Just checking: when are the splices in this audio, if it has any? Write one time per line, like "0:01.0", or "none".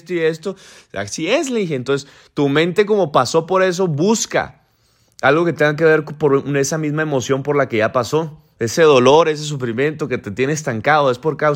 none